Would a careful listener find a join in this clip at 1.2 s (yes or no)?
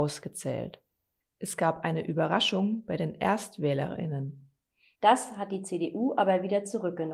yes